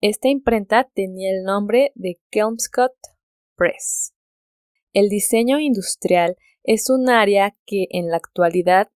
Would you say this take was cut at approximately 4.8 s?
yes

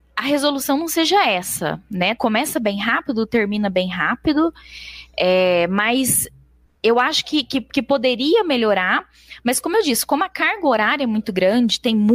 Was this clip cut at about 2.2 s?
yes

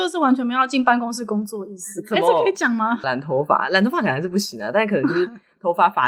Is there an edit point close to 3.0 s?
yes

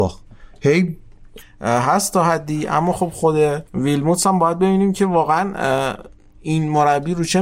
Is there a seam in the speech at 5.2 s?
no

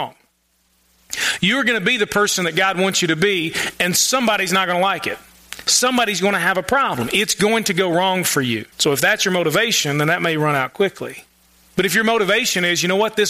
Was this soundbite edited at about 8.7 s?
yes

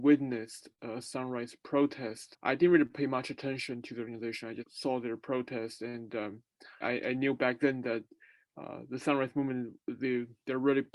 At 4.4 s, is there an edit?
no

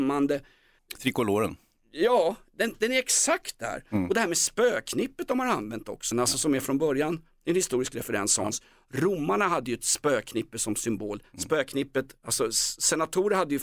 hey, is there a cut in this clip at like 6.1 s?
yes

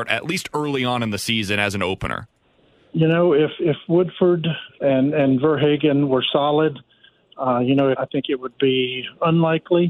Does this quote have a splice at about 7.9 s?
yes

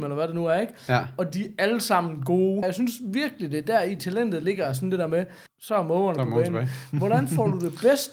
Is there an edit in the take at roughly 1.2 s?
no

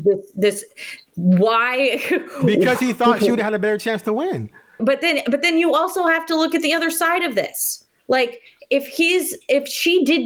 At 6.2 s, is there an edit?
no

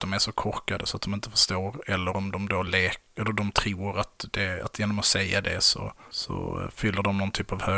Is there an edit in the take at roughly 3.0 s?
no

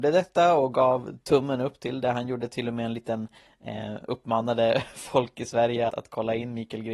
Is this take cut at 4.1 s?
yes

